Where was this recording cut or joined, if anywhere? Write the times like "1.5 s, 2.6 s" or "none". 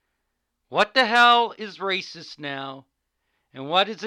none